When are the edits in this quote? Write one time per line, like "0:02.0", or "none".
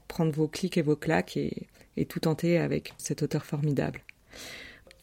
0:02.9